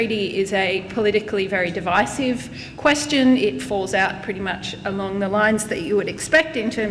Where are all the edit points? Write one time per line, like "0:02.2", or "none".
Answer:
none